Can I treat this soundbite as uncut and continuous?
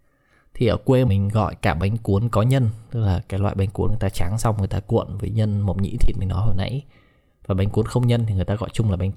no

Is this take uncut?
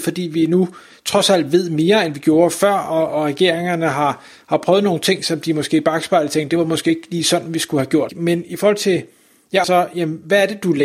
no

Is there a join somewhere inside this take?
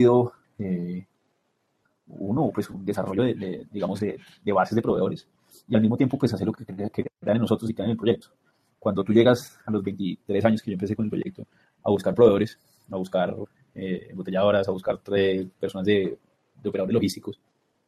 no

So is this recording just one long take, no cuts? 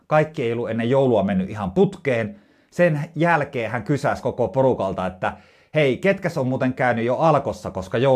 yes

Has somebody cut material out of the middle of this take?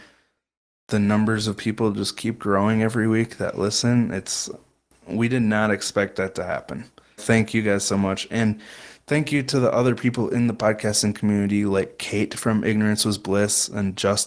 yes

